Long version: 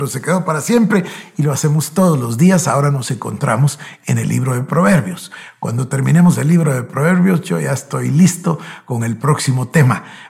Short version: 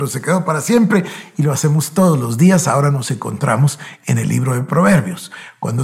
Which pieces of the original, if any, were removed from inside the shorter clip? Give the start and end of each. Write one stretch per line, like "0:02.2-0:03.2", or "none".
none